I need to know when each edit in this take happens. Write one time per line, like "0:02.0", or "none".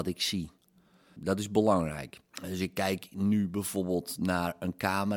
0:01.2
0:02.3